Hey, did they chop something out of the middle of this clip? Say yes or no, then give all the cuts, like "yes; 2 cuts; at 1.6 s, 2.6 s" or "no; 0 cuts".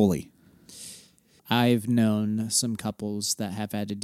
yes; 1 cut; at 1.4 s